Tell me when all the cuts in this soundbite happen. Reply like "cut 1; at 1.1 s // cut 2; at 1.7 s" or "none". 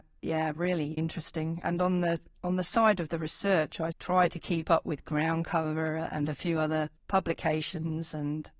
cut 1; at 1.0 s // cut 2; at 3.9 s // cut 3; at 7.0 s